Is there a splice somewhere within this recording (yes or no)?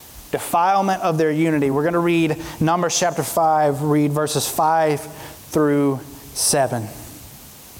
no